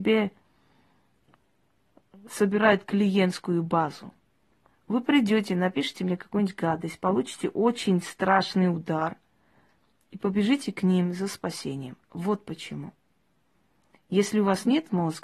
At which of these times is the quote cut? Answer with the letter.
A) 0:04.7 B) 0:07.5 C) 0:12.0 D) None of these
A